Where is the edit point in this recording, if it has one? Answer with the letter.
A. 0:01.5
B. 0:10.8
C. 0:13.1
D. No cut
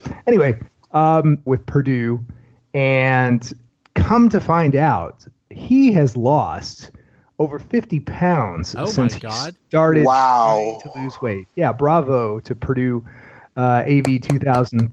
A